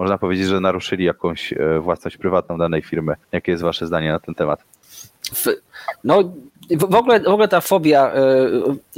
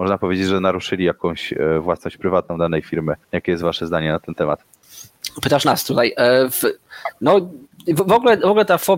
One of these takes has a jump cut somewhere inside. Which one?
first; 1 cut; at 5.3 s

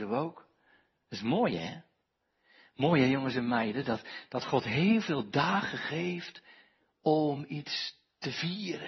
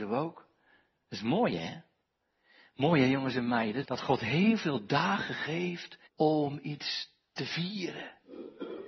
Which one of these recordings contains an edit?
second; 2 cuts; at 3.8 s, 6.1 s

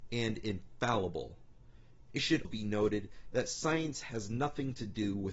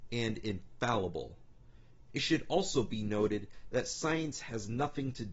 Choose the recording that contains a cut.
first; 1 cut; at 2.4 s

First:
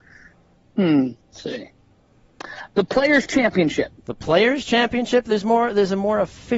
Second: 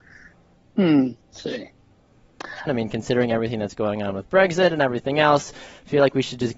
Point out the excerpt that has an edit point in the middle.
second; 1 cut; at 2.7 s

